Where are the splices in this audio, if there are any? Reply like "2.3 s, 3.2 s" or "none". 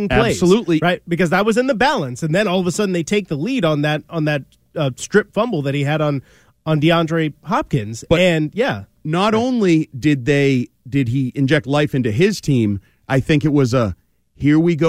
none